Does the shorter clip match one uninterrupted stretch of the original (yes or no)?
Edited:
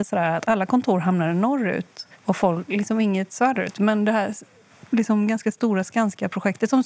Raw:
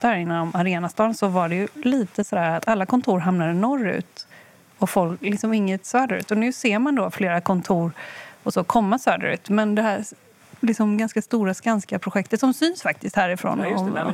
no